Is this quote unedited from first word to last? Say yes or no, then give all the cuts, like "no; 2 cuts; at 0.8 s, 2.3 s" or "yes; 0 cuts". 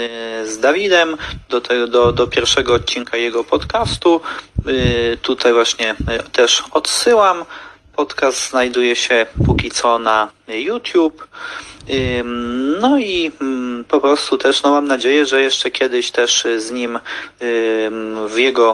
yes; 0 cuts